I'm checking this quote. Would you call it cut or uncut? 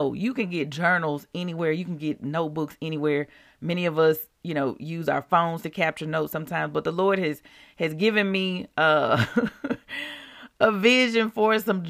uncut